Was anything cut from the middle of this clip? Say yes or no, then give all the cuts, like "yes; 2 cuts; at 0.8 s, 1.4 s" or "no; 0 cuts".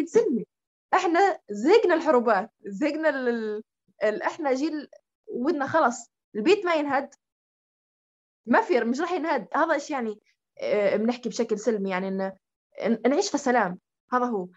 yes; 1 cut; at 9.5 s